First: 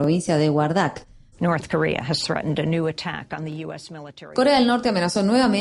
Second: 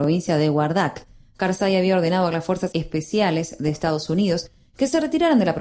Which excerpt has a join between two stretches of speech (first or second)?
first